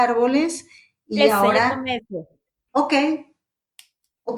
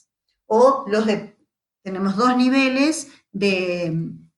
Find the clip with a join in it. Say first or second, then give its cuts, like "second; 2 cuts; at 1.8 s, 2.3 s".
first; 1 cut; at 2.7 s